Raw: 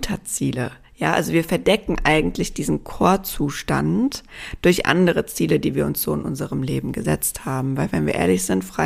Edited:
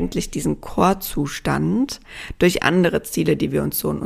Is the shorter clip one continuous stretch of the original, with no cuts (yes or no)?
yes